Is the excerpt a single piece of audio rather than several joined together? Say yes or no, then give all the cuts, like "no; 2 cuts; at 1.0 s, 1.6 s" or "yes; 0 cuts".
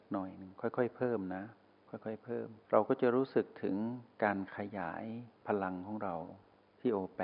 no; 1 cut; at 2.6 s